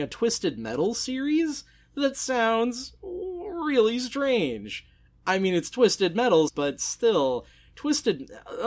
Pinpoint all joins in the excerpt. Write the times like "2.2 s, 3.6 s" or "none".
6.5 s